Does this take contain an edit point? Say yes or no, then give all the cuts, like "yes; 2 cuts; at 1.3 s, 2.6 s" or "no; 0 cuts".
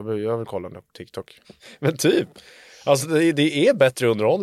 yes; 1 cut; at 1.4 s